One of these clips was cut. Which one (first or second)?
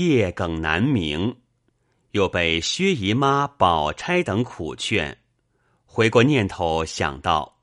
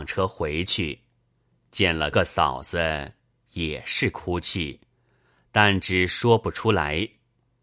second